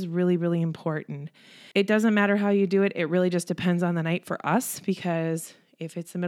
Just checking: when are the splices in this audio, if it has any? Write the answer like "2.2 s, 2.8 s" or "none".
1.7 s